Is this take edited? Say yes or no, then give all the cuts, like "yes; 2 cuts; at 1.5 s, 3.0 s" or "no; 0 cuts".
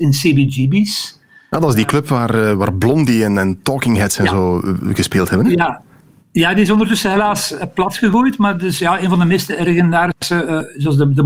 no; 0 cuts